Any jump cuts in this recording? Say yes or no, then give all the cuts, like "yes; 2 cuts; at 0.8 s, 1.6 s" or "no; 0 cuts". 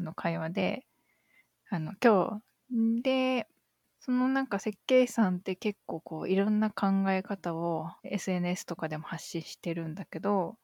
yes; 2 cuts; at 2.6 s, 8.0 s